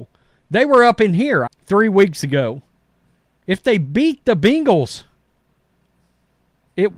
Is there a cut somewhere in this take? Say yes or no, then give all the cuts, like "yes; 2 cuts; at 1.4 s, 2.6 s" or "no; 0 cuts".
yes; 1 cut; at 1.5 s